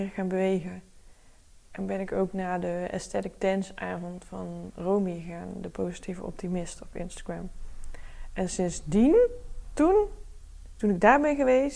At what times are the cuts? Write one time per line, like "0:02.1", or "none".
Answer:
none